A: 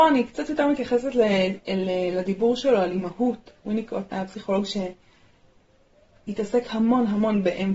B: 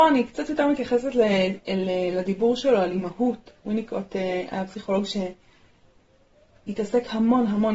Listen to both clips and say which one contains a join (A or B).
A